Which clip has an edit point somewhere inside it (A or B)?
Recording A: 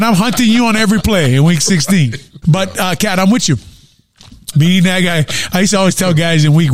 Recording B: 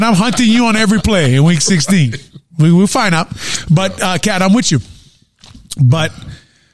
A